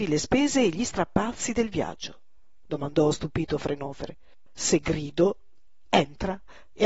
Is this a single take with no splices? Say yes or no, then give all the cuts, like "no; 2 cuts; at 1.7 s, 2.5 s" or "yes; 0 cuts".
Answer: no; 2 cuts; at 2.7 s, 4.5 s